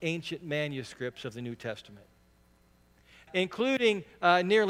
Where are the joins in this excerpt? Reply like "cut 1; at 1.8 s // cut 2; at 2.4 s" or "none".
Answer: cut 1; at 3.3 s

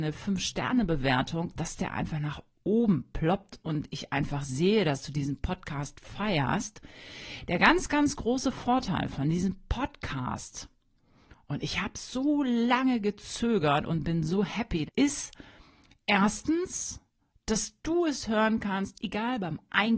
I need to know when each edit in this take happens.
cut 1; at 14.9 s

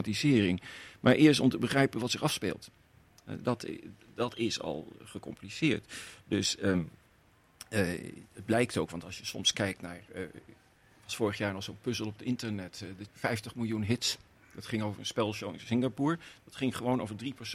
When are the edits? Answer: cut 1; at 13.1 s

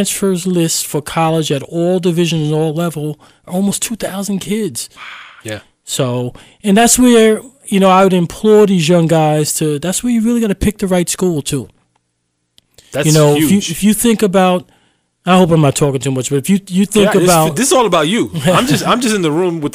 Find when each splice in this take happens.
cut 1; at 5.4 s

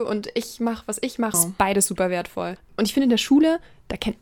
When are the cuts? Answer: cut 1; at 1.3 s // cut 2; at 2.6 s

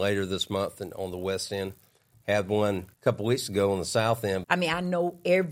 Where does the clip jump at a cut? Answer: cut 1; at 2.9 s // cut 2; at 4.4 s

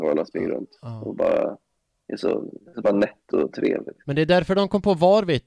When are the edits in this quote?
cut 1; at 4.0 s

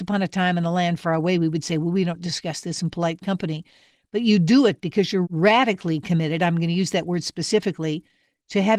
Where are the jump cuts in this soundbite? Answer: cut 1; at 1.0 s // cut 2; at 5.2 s

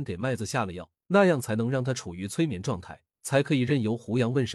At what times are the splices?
cut 1; at 1.0 s // cut 2; at 3.1 s

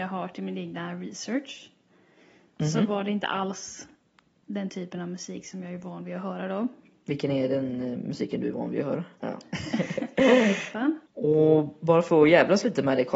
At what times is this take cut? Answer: cut 1; at 9.2 s // cut 2; at 11.1 s

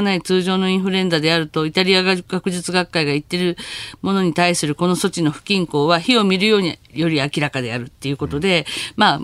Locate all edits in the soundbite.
none

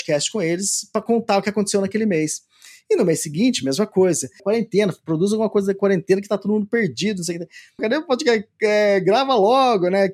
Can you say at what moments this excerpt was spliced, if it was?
cut 1; at 4.4 s // cut 2; at 7.8 s

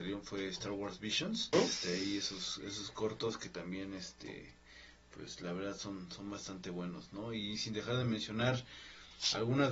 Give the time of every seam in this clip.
cut 1; at 1.5 s

